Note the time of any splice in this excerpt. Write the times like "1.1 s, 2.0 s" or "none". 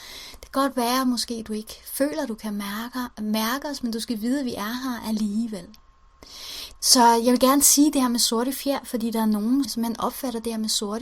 6.8 s, 9.6 s

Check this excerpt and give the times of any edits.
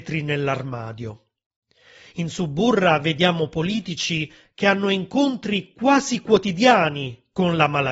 none

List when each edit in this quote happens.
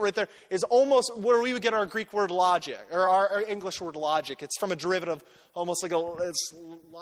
none

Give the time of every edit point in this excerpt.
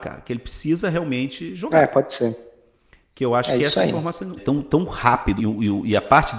4.4 s, 5.4 s

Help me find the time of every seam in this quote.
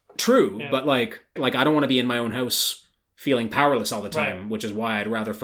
1.4 s

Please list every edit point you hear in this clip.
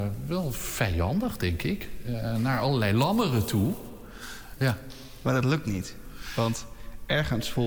4.6 s

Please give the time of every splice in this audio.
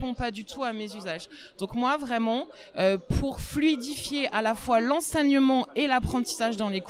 none

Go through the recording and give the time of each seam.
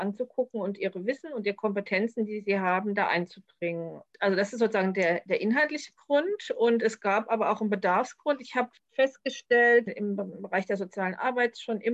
9.9 s

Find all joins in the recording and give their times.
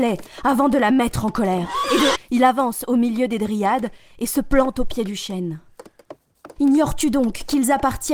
2.2 s, 6.6 s

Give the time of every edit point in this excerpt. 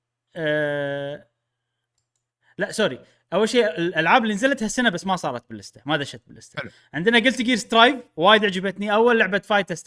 none

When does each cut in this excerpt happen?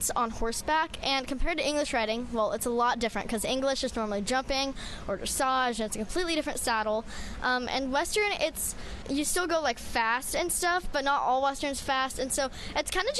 none

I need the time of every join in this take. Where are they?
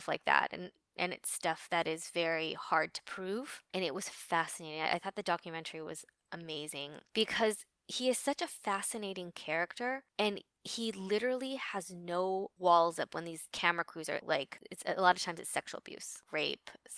3.7 s, 14.2 s

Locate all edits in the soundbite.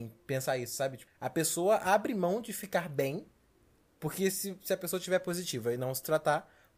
none

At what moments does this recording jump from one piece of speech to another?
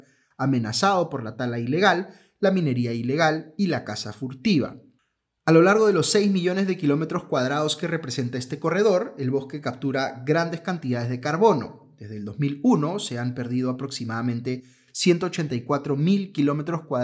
none

